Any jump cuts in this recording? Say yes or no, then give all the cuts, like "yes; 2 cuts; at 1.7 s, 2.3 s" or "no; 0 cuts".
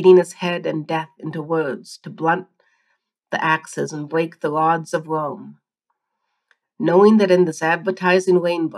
yes; 1 cut; at 6.6 s